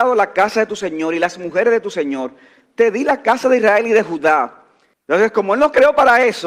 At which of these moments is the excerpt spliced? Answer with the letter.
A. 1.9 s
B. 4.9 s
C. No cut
B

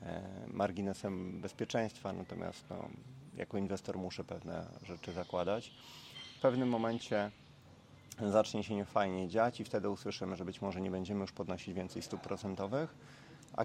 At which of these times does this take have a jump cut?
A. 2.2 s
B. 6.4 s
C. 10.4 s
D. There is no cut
B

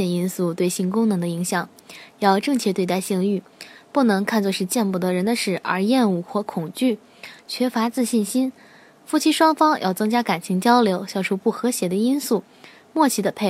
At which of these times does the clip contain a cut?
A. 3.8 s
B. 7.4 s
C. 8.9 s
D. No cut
B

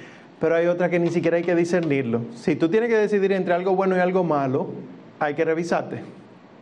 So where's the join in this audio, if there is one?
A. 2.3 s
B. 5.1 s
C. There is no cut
B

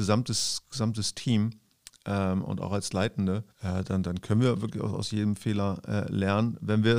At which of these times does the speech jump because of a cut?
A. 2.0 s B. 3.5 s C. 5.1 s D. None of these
B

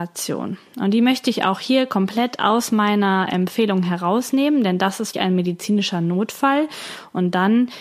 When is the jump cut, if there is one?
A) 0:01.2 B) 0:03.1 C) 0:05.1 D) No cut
C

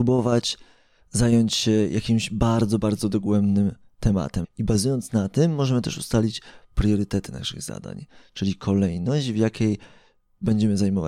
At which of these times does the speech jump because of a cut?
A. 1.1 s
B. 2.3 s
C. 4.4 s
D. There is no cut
C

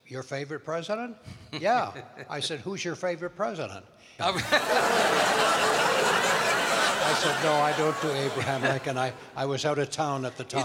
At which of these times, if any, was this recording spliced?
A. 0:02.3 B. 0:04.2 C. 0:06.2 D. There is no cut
B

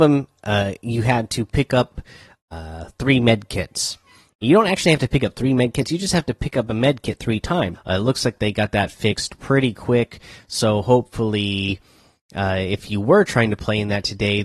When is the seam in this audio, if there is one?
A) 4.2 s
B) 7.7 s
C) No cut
B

